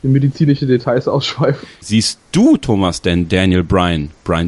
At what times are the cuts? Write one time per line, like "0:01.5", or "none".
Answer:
0:01.8